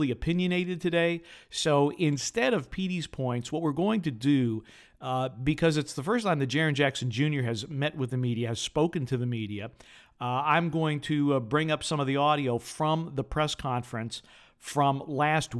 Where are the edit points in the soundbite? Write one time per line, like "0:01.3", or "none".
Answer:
none